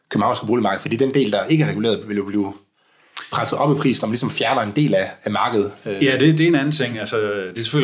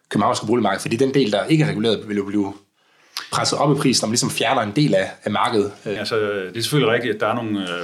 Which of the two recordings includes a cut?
second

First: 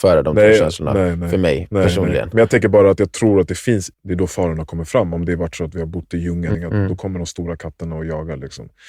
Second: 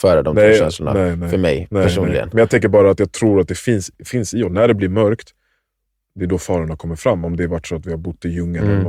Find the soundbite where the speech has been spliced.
first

